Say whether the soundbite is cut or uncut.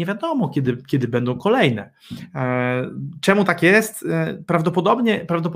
uncut